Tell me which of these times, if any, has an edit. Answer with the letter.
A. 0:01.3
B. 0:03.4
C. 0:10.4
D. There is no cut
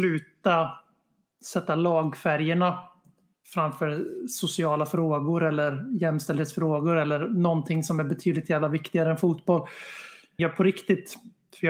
C